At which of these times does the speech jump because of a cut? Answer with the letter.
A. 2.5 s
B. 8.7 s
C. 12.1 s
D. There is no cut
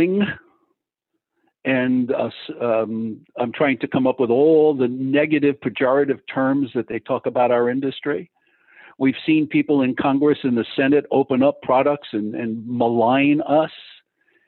A